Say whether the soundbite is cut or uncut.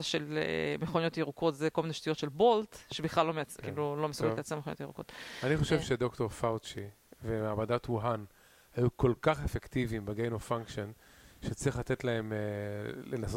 cut